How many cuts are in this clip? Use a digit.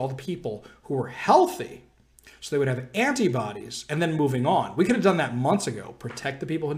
0